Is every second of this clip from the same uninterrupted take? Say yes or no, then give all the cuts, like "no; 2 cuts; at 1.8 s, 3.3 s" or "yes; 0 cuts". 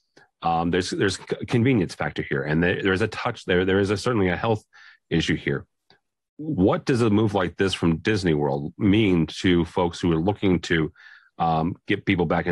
yes; 0 cuts